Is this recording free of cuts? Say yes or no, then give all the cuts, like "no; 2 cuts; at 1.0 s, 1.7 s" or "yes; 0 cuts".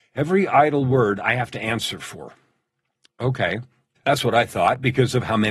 no; 1 cut; at 4.0 s